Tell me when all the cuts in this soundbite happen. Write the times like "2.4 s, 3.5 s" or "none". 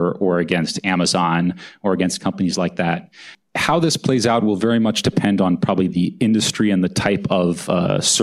none